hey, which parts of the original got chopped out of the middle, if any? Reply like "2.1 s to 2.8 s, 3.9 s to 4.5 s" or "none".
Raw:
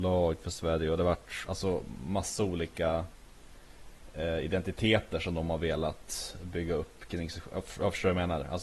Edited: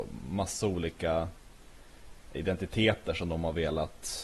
4.1 s to 4.4 s

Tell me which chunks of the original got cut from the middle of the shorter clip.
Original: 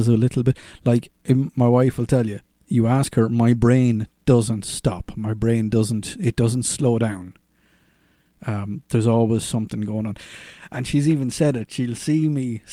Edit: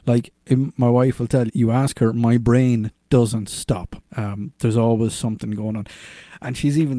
2.3 s to 2.6 s, 5.1 s to 8.3 s

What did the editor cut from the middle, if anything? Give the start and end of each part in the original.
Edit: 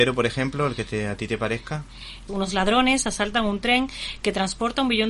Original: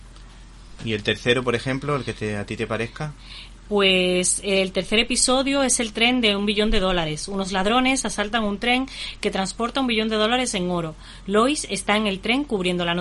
3.6 s to 7.3 s

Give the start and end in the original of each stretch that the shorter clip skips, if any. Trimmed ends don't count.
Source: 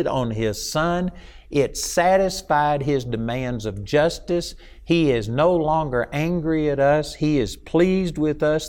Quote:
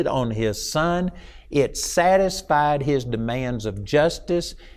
none

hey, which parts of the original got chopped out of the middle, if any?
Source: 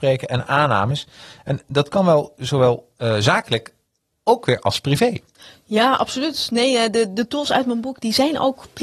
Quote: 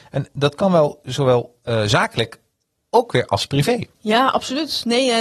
5.3 s to 5.6 s

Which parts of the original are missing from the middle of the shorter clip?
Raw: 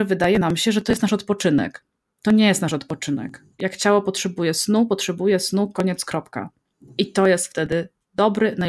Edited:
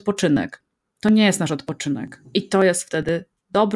3.5 s to 6.9 s

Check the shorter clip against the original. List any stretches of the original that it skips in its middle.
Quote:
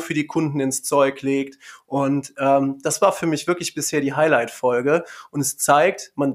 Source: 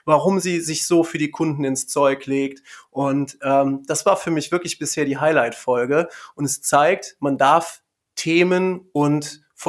none

